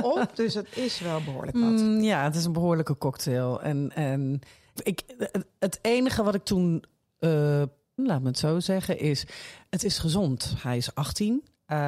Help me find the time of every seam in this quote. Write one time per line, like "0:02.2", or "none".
0:04.8
0:08.0